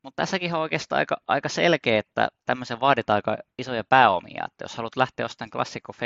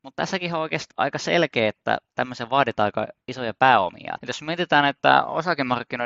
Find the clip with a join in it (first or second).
second